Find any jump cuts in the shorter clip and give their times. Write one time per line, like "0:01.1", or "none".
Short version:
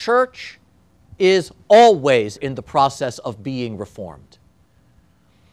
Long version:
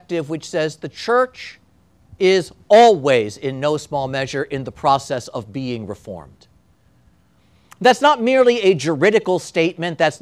0:02.4